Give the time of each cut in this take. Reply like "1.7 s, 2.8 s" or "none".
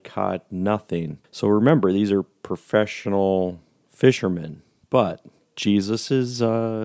4.8 s